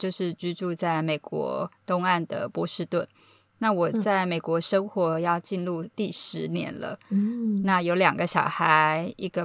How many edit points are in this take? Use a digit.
0